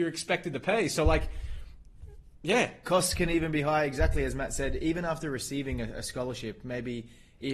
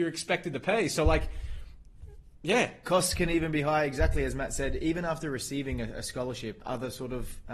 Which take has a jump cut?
second; 1 cut; at 6.6 s

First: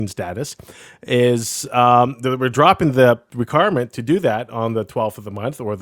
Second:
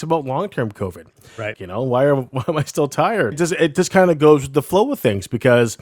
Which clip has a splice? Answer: second; 2 cuts; at 1.5 s, 3.3 s

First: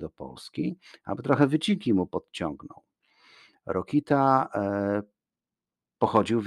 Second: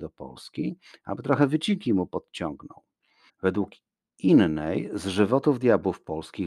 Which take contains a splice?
second; 1 cut; at 3.3 s

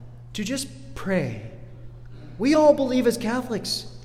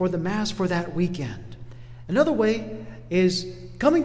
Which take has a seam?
second; 1 cut; at 2.0 s

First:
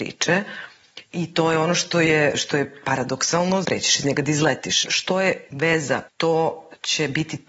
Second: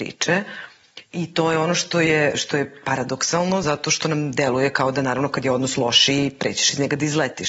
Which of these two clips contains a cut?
first; 3 cuts; at 3.6 s, 4.8 s, 6.1 s

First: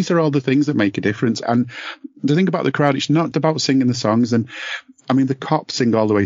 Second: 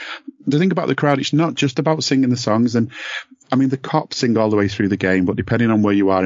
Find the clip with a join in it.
first; 2 cuts; at 1.4 s, 3.3 s

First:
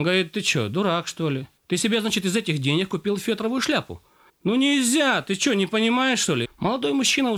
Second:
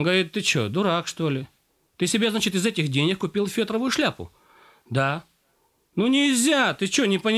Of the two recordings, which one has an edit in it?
first; 3 cuts; at 1.6 s, 4.3 s, 6.4 s

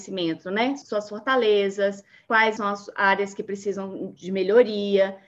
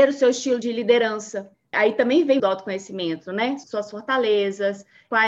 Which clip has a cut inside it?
second; 1 cut; at 2.4 s

